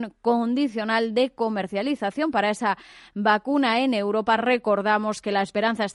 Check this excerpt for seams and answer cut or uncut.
uncut